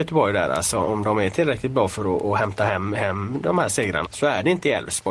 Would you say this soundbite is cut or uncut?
cut